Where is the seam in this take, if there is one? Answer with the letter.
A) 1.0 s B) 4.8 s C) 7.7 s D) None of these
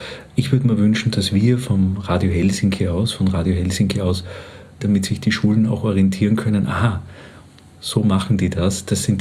B